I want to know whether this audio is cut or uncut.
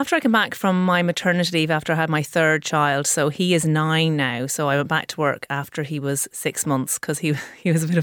uncut